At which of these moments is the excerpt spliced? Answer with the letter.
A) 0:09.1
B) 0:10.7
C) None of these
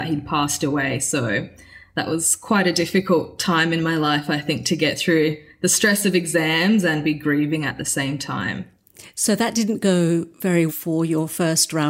B